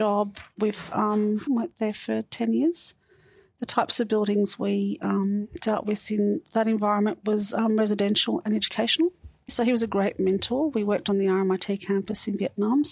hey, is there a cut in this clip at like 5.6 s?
no; 2 cuts; at 1.5 s, 9.5 s

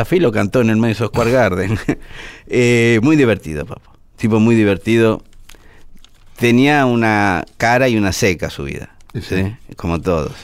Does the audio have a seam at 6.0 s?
no; 0 cuts

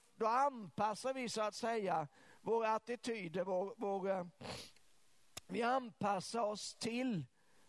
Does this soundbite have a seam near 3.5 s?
no; 0 cuts

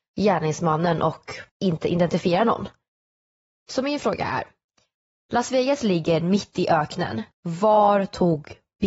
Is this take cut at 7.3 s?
yes; 2 cuts; at 1.5 s, 7.3 s

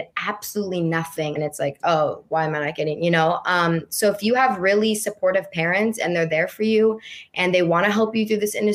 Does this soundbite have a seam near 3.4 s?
no; 1 cut; at 1.4 s

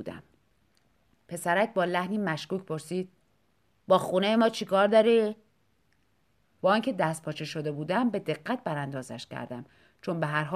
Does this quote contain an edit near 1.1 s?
no; 1 cut; at 6.4 s

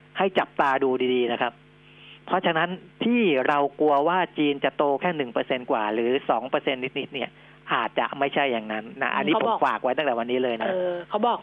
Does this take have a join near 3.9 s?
no; 0 cuts

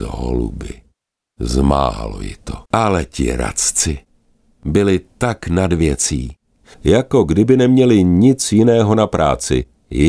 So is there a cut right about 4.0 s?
no; 2 cuts; at 2.6 s, 6.7 s

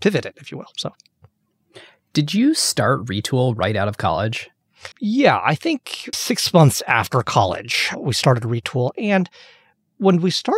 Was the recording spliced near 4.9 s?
yes; 2 cuts; at 4.9 s, 6.1 s

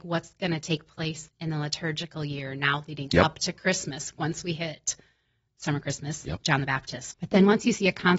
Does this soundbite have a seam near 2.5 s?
no; 2 cuts; at 1.3 s, 7.1 s

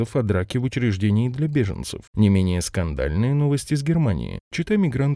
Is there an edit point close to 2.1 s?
yes; 1 cut; at 2.1 s

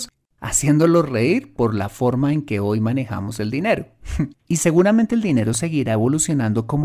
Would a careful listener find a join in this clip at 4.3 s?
yes; 1 cut; at 4.3 s

